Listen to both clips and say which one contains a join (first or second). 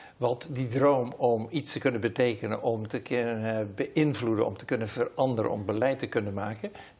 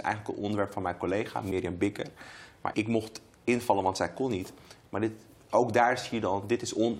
second